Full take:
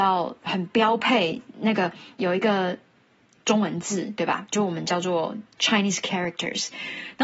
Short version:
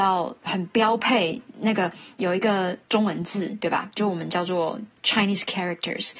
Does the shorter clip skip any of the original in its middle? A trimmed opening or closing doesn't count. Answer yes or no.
yes